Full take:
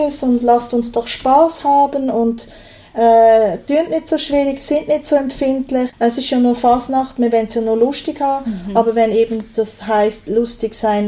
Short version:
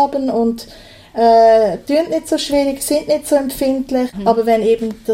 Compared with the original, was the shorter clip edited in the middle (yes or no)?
yes